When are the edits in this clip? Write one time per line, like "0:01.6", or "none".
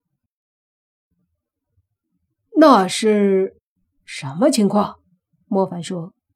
0:05.4